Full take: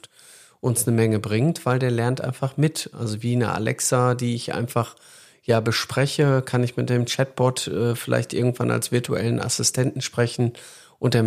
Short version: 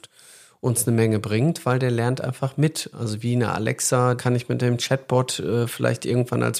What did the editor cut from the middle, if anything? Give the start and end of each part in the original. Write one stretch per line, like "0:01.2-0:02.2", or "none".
0:04.2-0:06.4